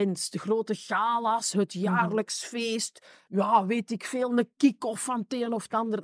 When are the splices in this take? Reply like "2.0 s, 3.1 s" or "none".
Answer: 3.3 s